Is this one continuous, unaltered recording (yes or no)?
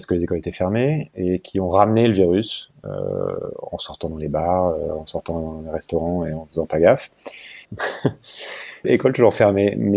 no